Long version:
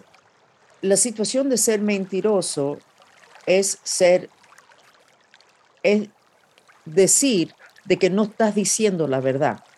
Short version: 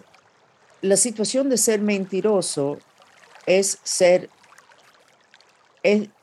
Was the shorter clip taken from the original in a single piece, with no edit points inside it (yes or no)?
yes